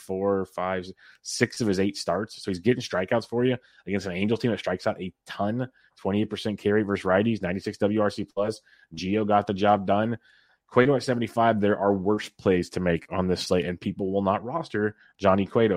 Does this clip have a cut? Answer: no; 0 cuts

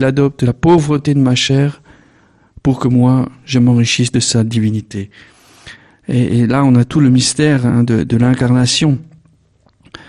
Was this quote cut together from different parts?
no; 0 cuts

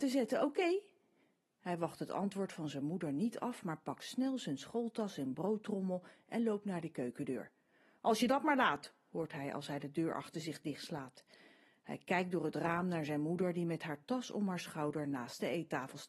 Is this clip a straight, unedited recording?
yes; 0 cuts

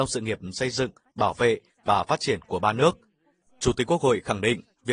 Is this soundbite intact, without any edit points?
no; 1 cut; at 3.4 s

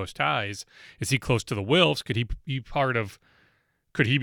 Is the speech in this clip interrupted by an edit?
no; 0 cuts

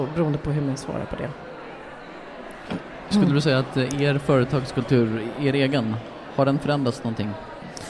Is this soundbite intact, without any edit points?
yes; 0 cuts

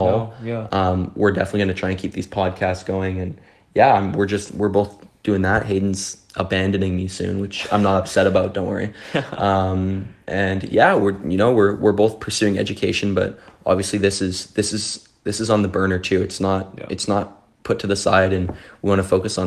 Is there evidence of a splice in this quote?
yes; 1 cut; at 17.5 s

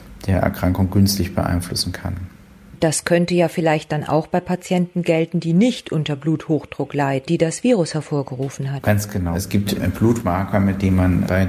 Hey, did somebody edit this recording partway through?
yes; 1 cut; at 7.3 s

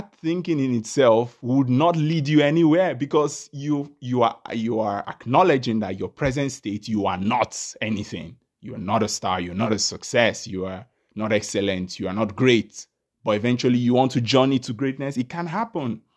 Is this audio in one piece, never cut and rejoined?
yes; 0 cuts

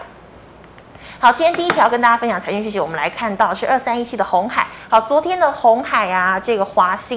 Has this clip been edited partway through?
no; 0 cuts

